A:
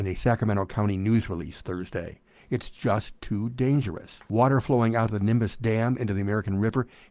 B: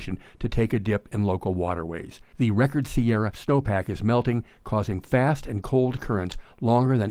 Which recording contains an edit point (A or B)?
A